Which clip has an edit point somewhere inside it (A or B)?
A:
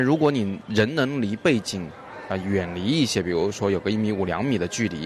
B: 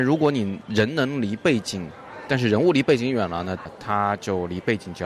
B